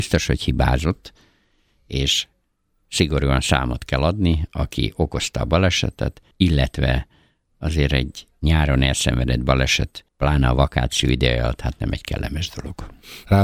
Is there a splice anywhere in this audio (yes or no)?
yes